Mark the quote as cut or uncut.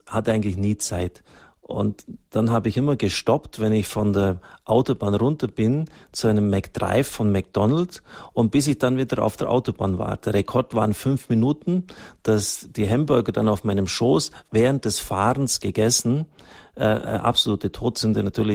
uncut